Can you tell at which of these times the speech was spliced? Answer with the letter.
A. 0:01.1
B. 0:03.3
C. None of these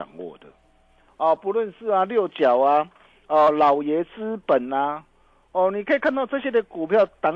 A